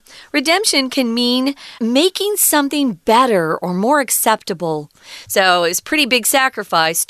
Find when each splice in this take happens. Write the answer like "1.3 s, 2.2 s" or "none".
1.8 s, 5.2 s